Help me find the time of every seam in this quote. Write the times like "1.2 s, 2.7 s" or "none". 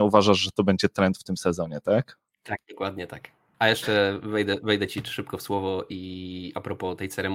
none